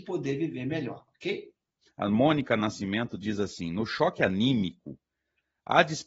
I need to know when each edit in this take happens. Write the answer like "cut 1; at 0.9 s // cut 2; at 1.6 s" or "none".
cut 1; at 1.8 s